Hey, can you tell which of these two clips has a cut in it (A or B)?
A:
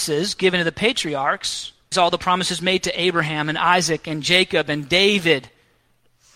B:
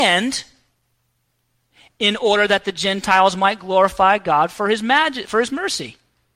A